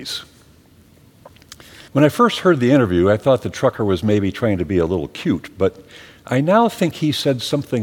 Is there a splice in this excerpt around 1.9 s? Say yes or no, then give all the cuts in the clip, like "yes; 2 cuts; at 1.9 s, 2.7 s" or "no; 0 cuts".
yes; 1 cut; at 1.9 s